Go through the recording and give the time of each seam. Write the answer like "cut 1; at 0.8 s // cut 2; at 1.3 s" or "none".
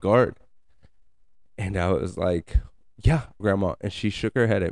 cut 1; at 3.4 s